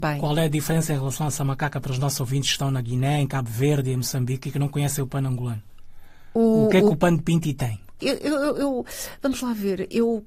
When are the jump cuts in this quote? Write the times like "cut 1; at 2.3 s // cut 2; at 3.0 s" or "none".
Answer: cut 1; at 8.0 s